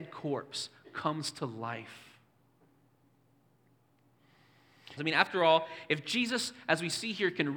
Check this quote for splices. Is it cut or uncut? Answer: cut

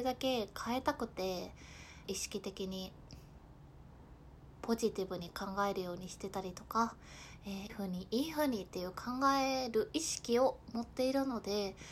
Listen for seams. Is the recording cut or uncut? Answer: cut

